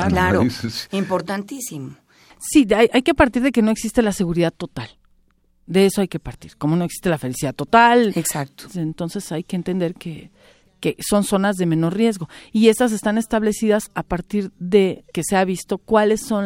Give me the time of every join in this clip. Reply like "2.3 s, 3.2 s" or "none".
8.7 s